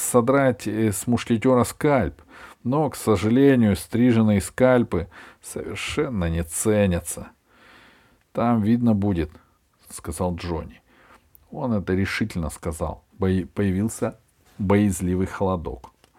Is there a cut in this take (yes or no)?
yes